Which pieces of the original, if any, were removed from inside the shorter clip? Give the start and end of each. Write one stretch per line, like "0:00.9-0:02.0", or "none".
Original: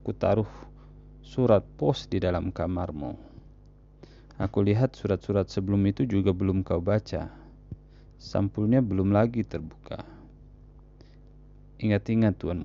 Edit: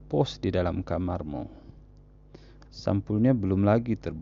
0:04.3-0:08.1